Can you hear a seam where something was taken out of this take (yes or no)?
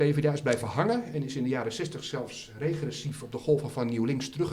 no